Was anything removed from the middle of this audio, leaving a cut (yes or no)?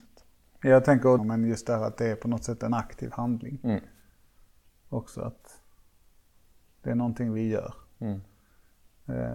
yes